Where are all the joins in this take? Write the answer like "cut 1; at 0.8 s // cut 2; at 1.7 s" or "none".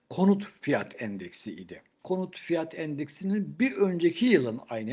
cut 1; at 2.0 s